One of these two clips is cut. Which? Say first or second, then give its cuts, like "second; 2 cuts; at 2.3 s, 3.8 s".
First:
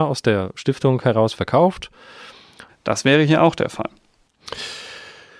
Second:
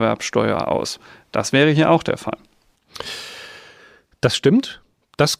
first; 1 cut; at 2.7 s